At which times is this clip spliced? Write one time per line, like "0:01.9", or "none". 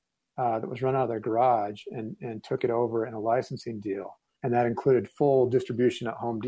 0:04.4